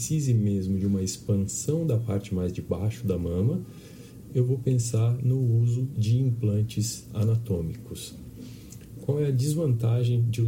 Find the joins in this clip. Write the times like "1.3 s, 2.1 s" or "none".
4.3 s